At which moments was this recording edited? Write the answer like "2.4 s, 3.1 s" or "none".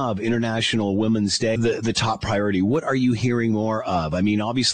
1.6 s